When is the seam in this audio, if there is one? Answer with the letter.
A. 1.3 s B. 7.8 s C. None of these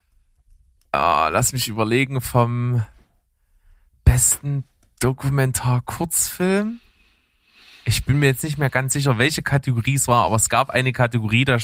C